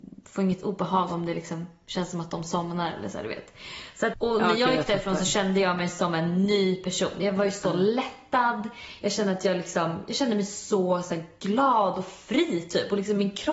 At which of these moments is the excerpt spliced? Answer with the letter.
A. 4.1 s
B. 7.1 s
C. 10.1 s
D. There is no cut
A